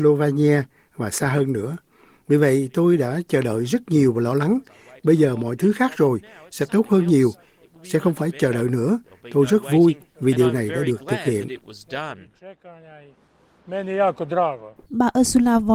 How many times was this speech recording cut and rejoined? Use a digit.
0